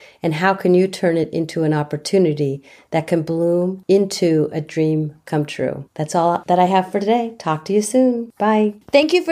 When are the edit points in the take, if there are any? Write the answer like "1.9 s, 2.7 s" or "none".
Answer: none